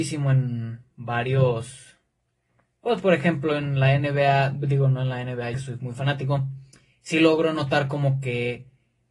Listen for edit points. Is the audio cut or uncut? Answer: cut